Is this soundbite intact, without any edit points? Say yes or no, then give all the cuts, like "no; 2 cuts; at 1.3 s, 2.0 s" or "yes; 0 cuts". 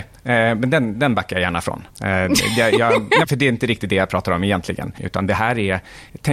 no; 2 cuts; at 3.2 s, 5.0 s